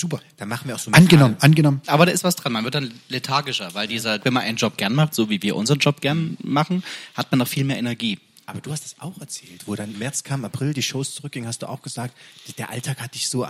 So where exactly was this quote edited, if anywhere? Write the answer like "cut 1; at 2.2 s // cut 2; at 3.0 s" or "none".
cut 1; at 1.8 s // cut 2; at 4.2 s // cut 3; at 9.9 s